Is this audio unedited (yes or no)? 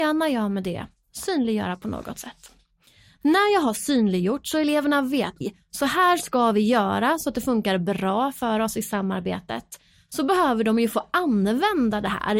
no